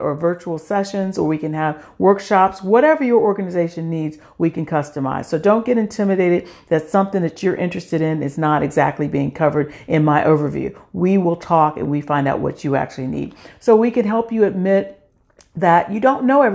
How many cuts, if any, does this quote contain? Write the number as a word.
zero